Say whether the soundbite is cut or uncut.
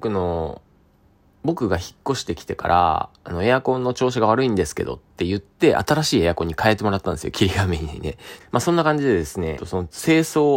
cut